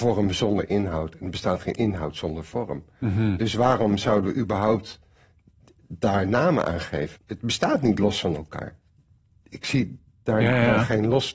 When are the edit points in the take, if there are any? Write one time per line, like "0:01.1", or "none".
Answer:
0:07.2